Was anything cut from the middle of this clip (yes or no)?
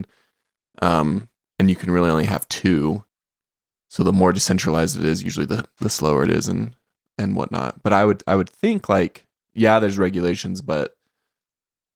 no